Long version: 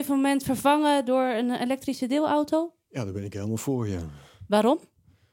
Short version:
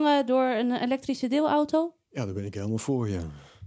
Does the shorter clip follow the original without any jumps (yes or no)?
yes